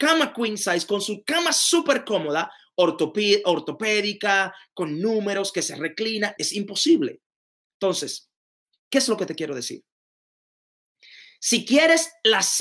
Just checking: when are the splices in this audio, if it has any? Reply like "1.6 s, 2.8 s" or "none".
6.3 s